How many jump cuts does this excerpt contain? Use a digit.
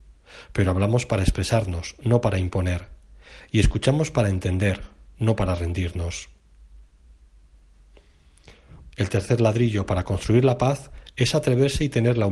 1